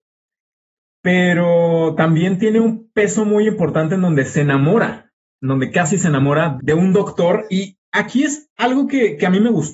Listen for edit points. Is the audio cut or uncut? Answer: cut